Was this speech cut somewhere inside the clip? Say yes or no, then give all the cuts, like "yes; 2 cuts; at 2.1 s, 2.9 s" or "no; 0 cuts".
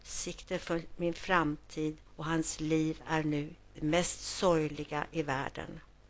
yes; 1 cut; at 2.1 s